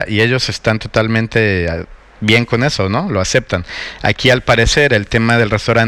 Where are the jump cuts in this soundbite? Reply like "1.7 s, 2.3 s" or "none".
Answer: none